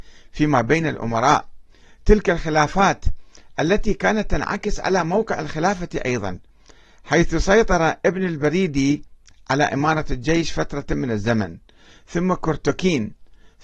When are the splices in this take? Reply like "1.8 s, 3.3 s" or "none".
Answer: none